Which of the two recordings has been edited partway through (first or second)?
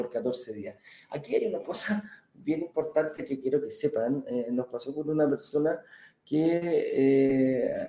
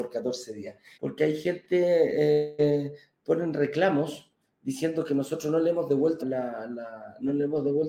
second